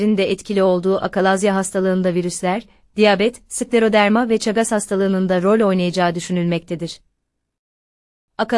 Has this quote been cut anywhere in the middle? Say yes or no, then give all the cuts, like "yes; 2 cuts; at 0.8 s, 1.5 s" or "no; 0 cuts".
no; 0 cuts